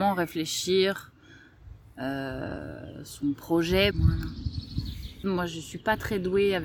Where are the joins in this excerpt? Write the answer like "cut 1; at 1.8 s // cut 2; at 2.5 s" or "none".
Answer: cut 1; at 3.9 s // cut 2; at 5.2 s